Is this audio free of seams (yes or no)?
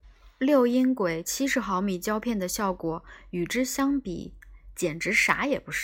yes